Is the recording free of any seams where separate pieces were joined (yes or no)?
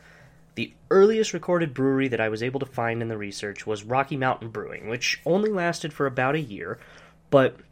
yes